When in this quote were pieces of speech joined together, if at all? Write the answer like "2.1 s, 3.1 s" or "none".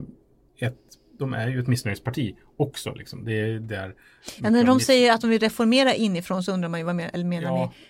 none